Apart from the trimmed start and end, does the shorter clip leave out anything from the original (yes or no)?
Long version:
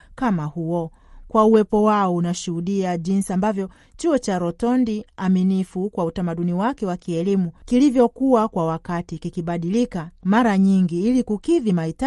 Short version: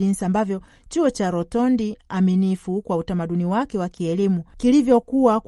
no